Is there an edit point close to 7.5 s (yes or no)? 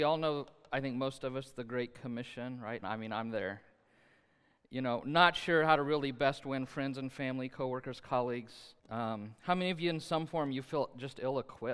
no